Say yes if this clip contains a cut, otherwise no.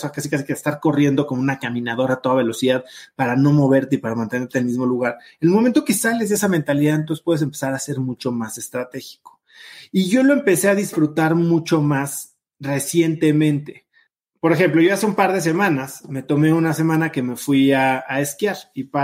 no